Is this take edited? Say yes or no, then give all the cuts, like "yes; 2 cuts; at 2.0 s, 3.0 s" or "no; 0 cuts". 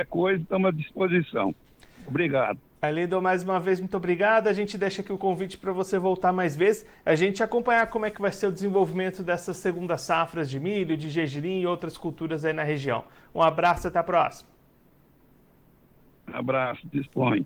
no; 0 cuts